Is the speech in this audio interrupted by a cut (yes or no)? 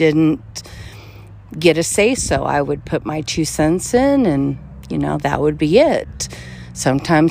no